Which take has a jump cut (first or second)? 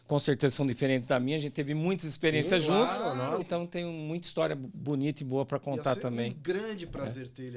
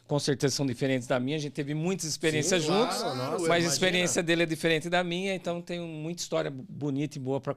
first